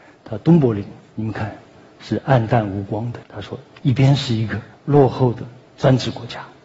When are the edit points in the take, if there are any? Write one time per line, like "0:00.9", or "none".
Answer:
0:03.2
0:04.7